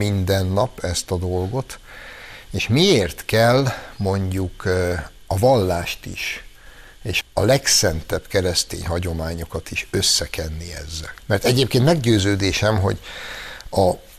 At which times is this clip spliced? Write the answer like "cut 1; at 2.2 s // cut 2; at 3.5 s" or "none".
cut 1; at 7.2 s // cut 2; at 11.2 s